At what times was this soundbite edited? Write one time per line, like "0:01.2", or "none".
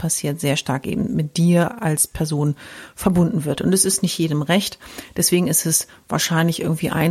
none